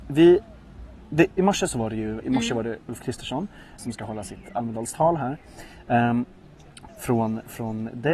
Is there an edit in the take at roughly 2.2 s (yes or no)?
yes